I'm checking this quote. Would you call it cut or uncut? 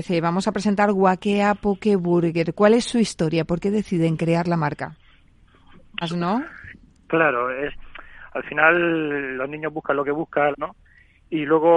cut